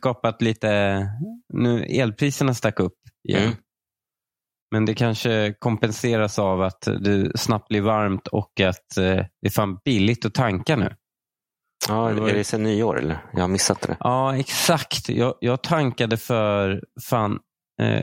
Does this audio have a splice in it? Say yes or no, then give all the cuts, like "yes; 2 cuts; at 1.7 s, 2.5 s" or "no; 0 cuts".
no; 0 cuts